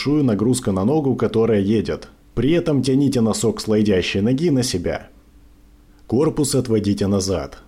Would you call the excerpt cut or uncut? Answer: cut